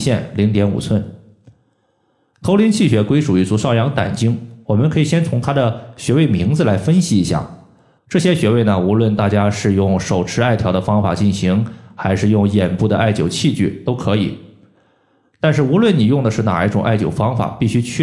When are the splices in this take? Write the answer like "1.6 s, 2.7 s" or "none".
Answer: 8.0 s